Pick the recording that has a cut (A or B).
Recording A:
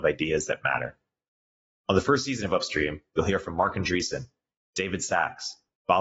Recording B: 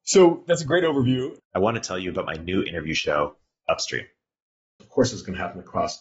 B